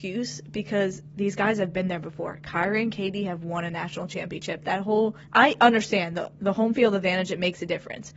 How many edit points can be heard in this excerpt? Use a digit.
1